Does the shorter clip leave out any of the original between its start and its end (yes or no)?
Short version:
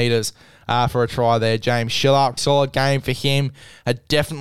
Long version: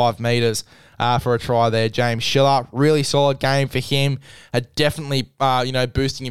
yes